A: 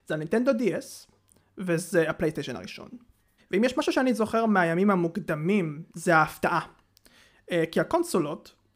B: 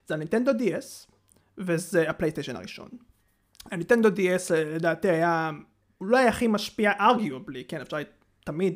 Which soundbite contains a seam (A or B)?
A